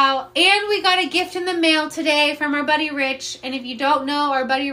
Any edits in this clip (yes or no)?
no